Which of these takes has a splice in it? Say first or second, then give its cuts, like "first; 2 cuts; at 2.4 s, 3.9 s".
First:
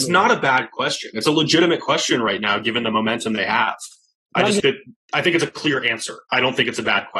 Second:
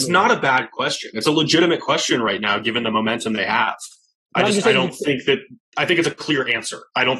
first; 1 cut; at 4.6 s